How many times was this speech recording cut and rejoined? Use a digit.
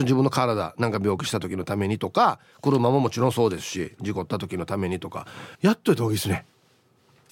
1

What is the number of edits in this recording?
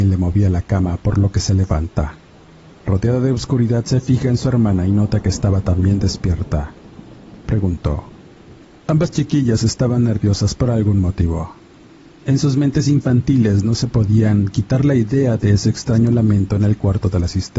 1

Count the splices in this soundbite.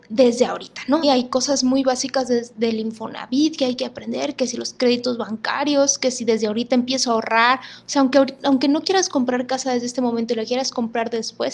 1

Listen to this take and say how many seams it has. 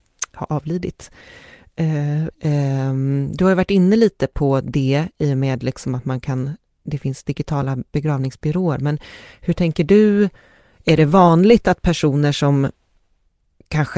1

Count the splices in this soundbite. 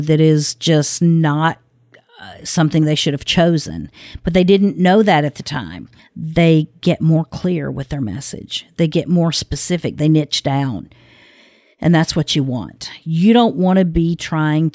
1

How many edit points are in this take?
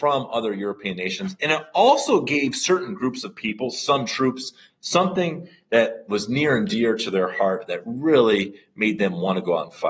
1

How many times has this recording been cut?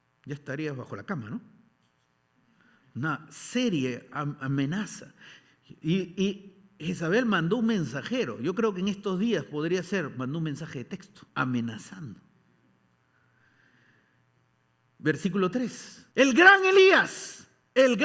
2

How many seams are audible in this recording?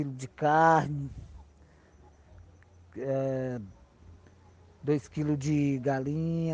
0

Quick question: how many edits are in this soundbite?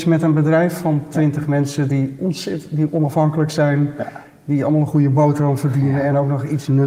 0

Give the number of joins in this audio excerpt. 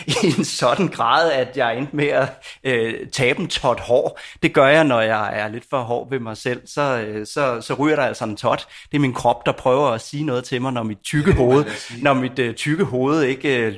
0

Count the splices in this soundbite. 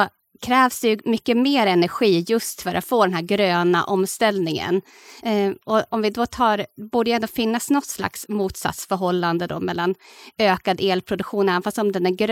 1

